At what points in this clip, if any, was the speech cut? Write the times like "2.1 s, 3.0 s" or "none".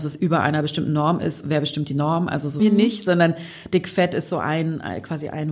2.6 s